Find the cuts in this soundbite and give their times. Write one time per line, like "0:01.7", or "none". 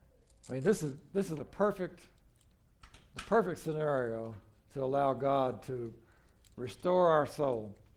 0:01.4